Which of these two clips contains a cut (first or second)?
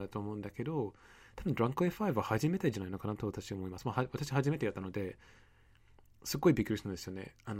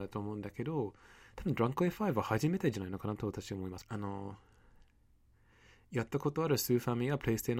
second